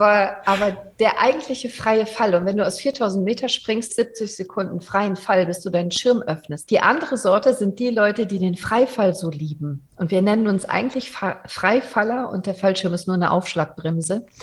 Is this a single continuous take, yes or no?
no